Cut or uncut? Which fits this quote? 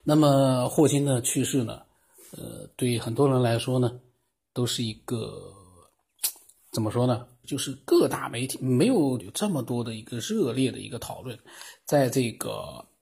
cut